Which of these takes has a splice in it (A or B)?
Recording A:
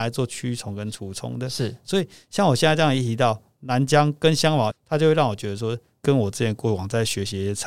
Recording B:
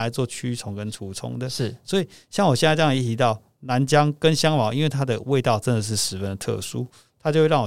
A